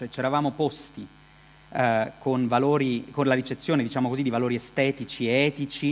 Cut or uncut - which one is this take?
uncut